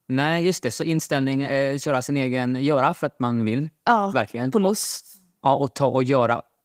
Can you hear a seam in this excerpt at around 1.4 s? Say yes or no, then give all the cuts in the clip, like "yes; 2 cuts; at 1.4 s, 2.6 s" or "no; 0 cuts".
no; 0 cuts